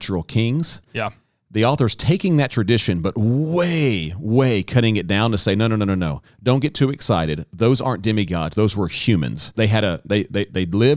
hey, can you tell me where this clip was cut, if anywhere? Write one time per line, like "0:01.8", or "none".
0:09.5